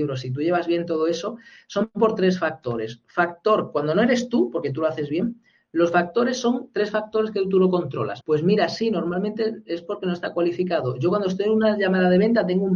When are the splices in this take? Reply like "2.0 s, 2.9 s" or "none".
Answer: 8.2 s